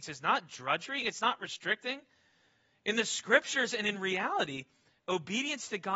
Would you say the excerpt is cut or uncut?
cut